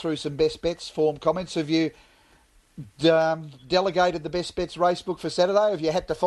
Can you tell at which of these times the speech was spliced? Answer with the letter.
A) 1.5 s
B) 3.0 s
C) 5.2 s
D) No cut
D